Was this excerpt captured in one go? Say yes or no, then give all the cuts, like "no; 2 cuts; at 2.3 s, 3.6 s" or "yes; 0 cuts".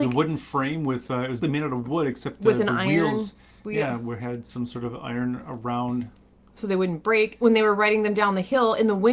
no; 1 cut; at 1.4 s